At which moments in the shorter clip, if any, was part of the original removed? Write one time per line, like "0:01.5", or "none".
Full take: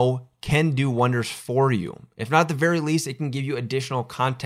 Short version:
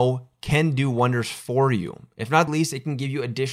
0:02.5